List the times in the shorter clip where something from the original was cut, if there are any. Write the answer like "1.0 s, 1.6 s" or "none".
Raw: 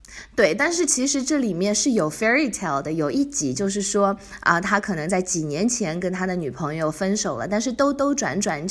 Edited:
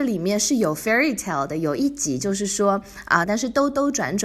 3.2 s

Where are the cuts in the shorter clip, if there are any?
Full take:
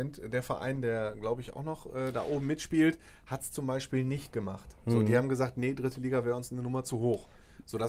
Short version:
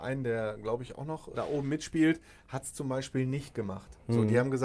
1.3 s

